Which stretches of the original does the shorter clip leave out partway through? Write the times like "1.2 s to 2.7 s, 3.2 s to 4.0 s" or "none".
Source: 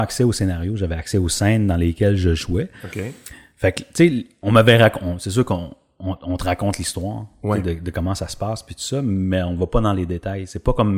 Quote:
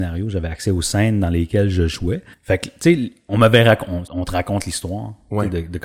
2.8 s to 3.5 s, 5.2 s to 6.2 s